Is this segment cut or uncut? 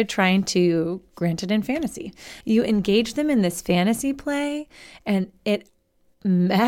cut